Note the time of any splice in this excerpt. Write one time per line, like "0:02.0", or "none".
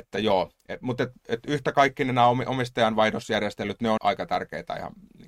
0:04.0